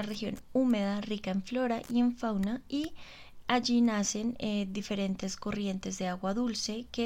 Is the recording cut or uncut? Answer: uncut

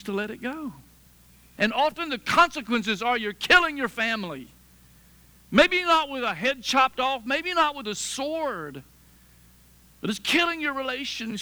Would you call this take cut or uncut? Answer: cut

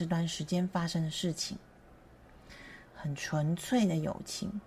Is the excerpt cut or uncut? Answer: cut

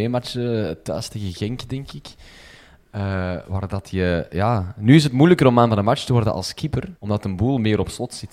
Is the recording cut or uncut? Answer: cut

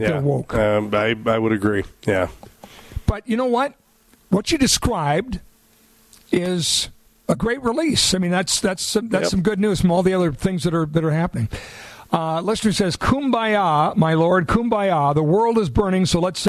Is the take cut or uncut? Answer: uncut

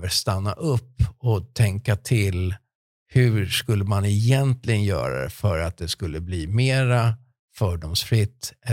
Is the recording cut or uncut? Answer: uncut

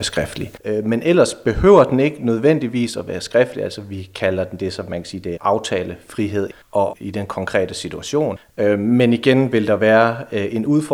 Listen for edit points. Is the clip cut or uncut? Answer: cut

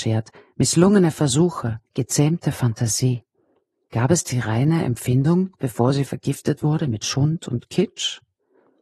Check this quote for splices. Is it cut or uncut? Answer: uncut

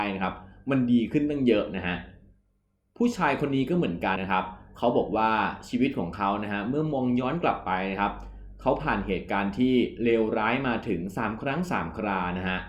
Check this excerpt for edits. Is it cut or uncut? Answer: cut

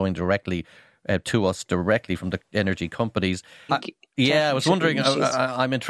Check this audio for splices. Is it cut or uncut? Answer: cut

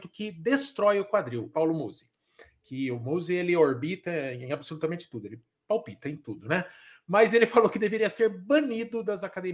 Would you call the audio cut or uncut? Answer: cut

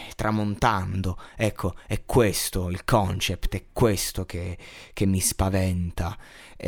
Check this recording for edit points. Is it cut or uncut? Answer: uncut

